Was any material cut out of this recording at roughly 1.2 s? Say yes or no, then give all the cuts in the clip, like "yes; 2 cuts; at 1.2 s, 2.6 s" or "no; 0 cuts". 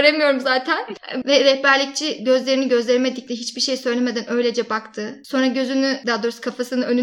yes; 1 cut; at 1.2 s